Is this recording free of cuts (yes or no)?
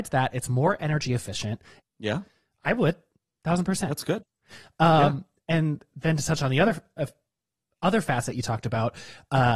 no